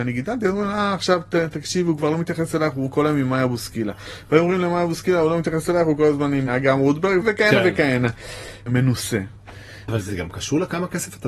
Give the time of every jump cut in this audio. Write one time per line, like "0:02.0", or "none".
0:08.7
0:09.9